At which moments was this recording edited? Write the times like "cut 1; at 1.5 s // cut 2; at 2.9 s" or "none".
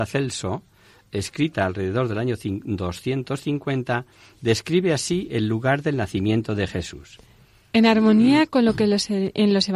none